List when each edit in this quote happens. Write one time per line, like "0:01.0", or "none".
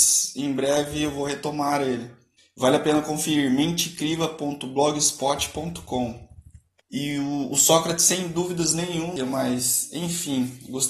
0:06.8
0:09.2